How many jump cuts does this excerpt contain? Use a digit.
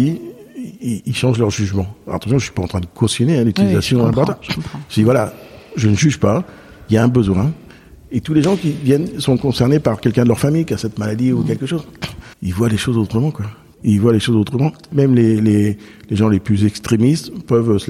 1